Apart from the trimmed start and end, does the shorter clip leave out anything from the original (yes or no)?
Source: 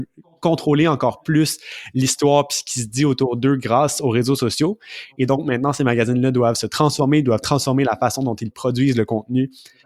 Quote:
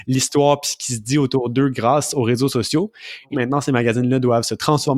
yes